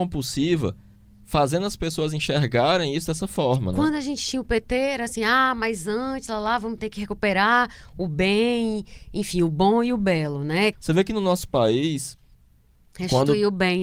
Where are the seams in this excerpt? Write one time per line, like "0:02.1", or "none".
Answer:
0:10.7